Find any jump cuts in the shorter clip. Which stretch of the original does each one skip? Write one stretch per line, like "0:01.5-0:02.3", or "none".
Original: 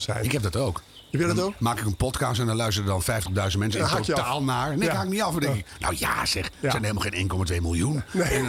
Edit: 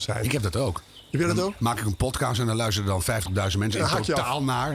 none